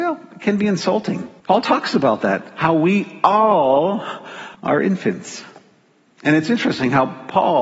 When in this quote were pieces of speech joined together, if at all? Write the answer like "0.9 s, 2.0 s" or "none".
1.4 s, 4.5 s